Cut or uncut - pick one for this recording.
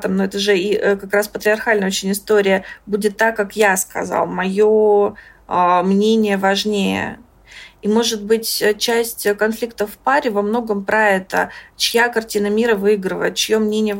uncut